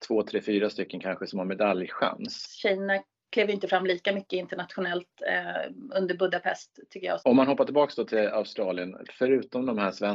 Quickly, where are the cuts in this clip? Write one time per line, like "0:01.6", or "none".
0:02.4
0:07.2